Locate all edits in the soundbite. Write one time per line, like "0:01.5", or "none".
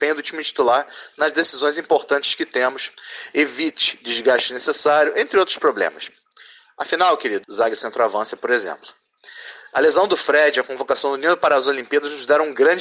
0:07.4